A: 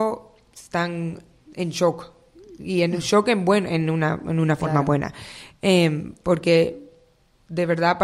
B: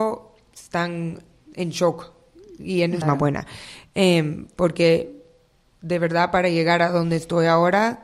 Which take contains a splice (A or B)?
B